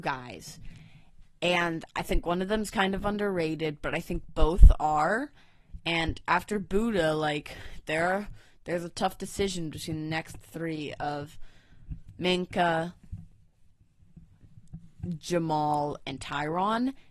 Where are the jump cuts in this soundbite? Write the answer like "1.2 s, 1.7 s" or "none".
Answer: none

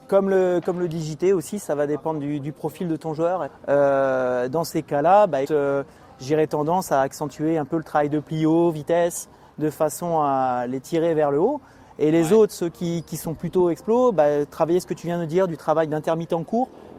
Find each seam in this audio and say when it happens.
3.5 s, 5.4 s

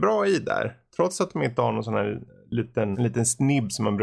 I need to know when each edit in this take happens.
2.9 s

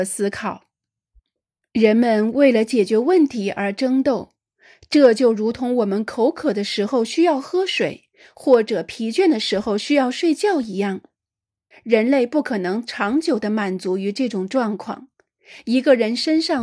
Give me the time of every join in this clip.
11.7 s

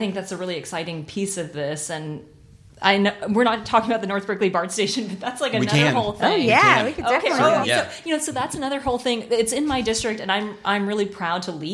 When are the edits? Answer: 7.6 s

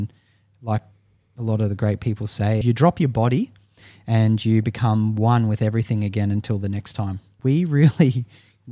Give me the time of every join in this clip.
2.6 s, 7.4 s

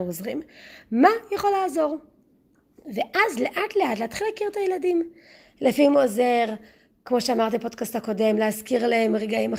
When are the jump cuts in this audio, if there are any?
none

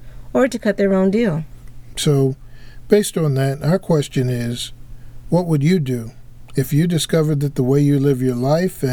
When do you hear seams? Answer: 1.9 s

